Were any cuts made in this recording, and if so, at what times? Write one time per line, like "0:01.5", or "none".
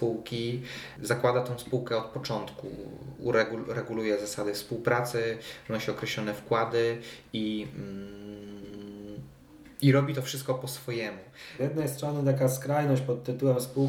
0:09.7
0:11.6